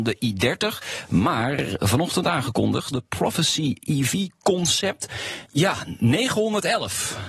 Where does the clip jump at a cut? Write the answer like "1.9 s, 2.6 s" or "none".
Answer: 2.9 s, 5.4 s